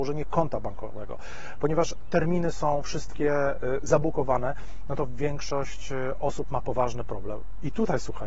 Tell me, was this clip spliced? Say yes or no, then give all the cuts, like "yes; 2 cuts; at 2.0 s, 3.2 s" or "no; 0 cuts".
no; 0 cuts